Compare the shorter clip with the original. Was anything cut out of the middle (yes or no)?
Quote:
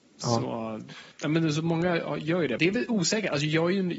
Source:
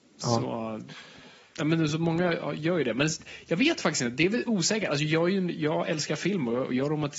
yes